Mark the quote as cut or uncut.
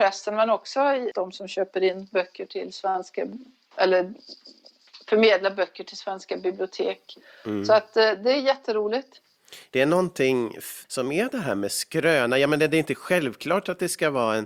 cut